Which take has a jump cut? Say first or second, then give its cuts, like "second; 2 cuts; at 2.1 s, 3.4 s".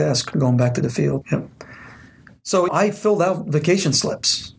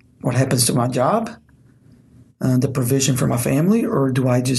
first; 2 cuts; at 1.2 s, 2.7 s